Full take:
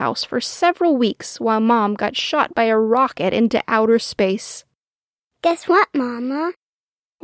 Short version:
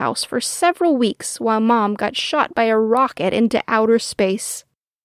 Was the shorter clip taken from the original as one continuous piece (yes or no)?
yes